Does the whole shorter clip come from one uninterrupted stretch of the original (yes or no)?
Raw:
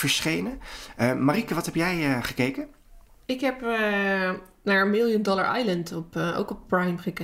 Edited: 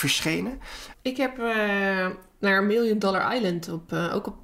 no